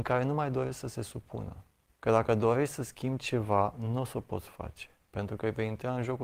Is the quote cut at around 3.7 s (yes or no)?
no